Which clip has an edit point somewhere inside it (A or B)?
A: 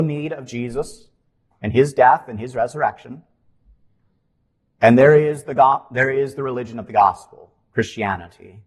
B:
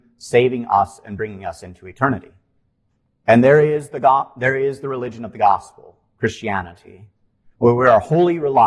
B